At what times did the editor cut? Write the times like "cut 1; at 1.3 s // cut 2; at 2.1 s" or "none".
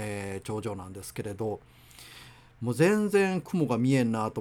none

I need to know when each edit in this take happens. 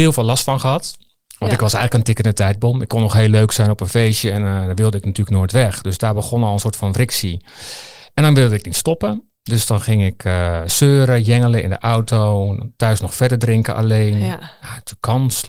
none

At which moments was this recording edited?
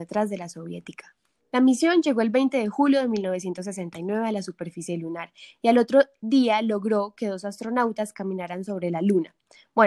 cut 1; at 1.4 s

